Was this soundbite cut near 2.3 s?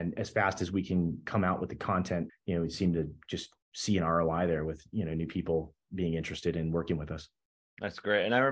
yes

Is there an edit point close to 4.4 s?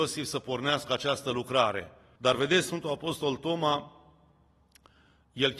no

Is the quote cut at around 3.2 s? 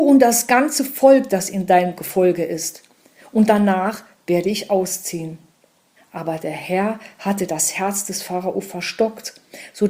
no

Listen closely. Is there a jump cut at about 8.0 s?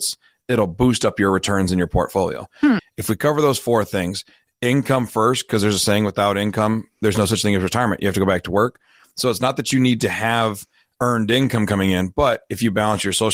no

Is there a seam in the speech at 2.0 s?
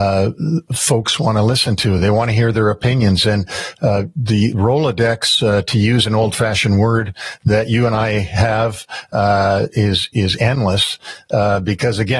no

